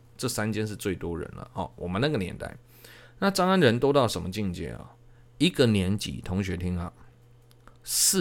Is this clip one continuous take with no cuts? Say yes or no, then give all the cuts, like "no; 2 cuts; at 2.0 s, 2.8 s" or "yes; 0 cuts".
yes; 0 cuts